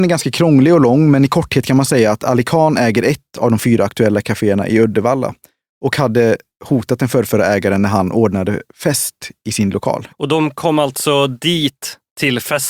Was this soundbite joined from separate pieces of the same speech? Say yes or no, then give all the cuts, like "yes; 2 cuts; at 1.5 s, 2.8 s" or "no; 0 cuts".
yes; 1 cut; at 10.1 s